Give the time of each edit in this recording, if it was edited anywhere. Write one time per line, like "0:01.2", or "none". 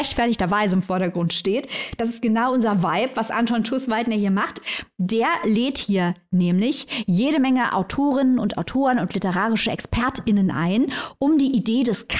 none